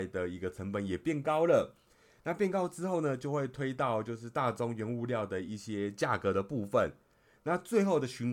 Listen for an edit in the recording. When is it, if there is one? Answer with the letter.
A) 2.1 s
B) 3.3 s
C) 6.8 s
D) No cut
D